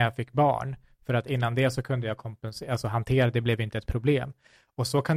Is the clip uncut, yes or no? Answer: yes